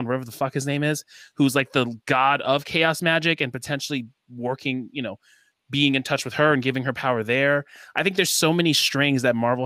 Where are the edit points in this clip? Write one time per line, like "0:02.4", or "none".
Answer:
none